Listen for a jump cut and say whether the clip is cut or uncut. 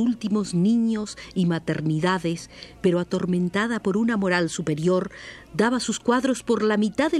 uncut